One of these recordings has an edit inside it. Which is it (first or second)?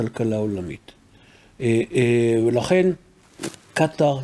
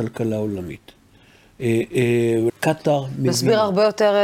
second